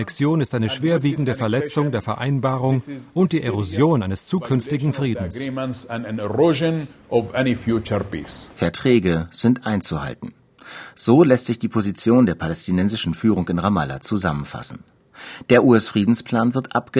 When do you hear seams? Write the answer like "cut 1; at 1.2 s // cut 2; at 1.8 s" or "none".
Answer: cut 1; at 8.5 s